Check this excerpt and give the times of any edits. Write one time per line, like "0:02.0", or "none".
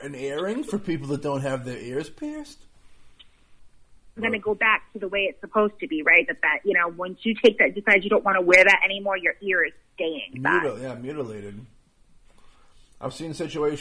0:04.2
0:10.3